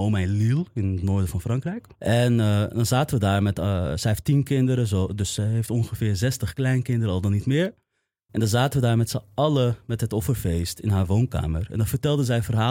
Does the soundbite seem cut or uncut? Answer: cut